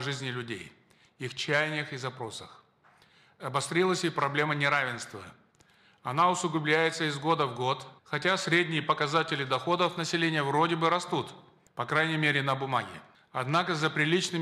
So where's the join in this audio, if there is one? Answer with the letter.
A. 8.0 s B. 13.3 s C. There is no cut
A